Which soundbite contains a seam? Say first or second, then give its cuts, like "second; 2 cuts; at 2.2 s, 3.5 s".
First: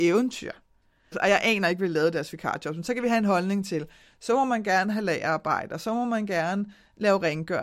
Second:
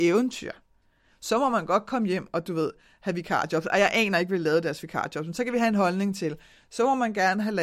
first; 1 cut; at 1.1 s